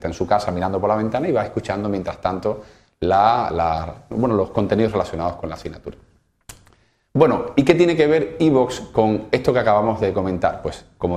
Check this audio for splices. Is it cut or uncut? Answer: uncut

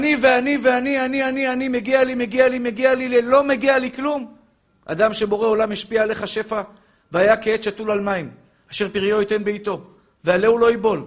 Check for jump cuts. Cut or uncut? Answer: cut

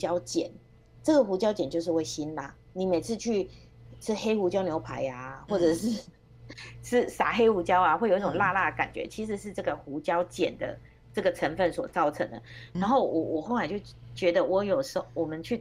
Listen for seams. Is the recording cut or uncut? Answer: cut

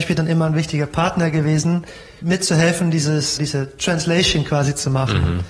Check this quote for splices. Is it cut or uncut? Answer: cut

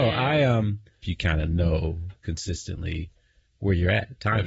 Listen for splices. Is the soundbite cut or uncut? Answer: cut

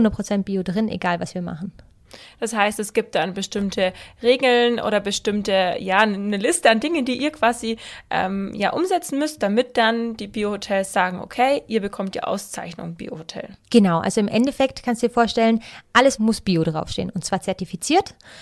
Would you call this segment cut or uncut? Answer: cut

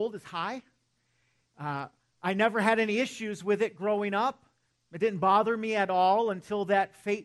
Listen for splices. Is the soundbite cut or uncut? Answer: uncut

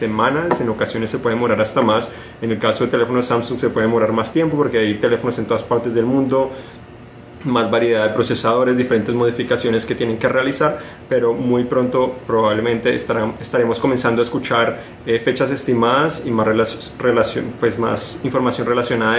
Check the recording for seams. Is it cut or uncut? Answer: uncut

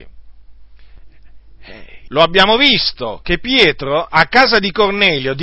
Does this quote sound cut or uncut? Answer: cut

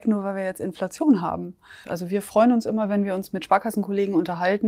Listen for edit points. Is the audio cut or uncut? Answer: cut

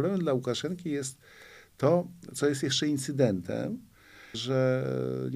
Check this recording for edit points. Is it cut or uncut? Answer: cut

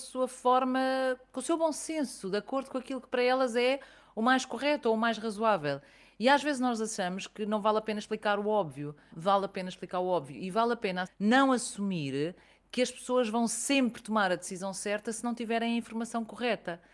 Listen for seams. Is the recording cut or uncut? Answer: cut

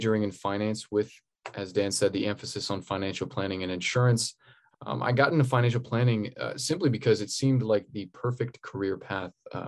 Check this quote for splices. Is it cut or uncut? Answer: cut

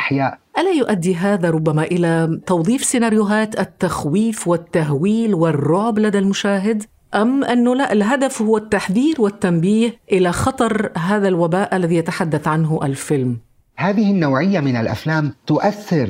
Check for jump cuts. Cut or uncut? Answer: uncut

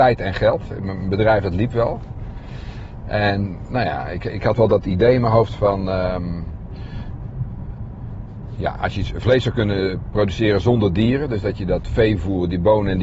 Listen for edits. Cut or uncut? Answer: uncut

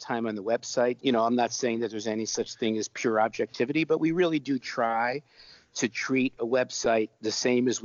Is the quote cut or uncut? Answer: cut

